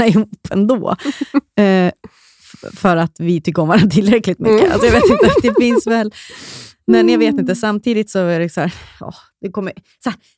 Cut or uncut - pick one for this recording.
uncut